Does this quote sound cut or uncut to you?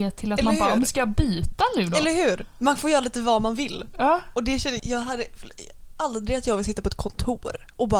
cut